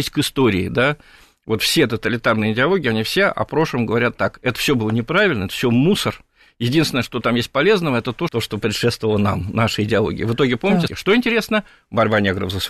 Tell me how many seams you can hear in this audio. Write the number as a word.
two